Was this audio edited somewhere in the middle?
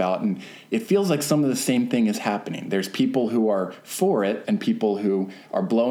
yes; 1 cut; at 4.4 s

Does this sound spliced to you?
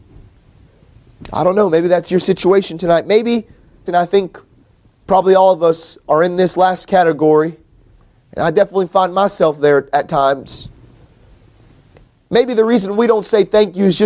yes; 1 cut; at 3.9 s

